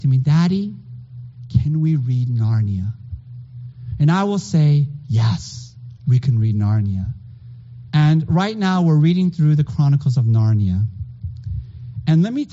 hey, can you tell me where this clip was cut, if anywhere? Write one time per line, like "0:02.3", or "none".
0:07.9